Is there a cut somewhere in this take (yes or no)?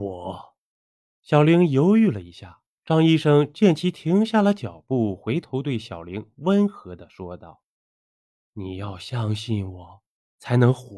yes